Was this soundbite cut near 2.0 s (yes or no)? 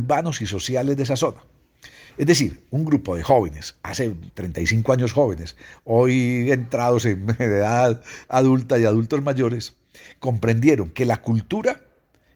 no